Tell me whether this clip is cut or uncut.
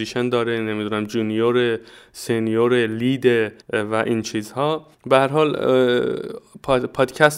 cut